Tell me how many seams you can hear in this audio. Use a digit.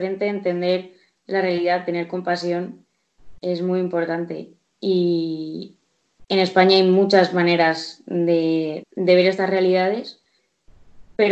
1